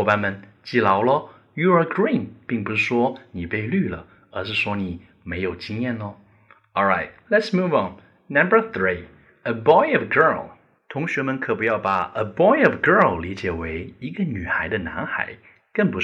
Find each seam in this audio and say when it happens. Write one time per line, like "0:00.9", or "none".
none